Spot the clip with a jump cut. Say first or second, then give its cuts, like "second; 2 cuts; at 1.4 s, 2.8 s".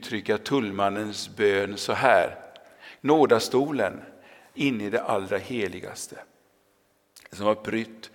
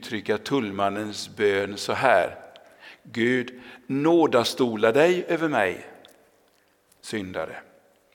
first; 2 cuts; at 3.0 s, 4.5 s